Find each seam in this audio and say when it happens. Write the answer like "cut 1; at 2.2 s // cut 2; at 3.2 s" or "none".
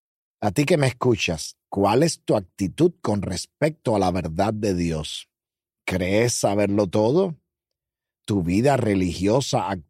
cut 1; at 1.6 s